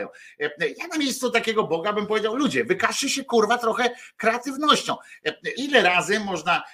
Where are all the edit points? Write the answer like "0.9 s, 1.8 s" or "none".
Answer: 5.5 s